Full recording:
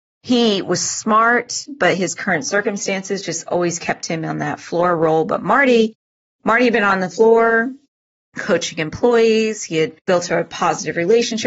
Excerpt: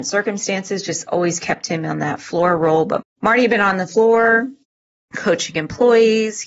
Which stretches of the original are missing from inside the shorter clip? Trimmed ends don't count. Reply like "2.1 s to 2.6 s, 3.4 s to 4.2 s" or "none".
5.4 s to 6.2 s